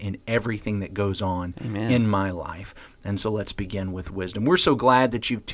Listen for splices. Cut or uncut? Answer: uncut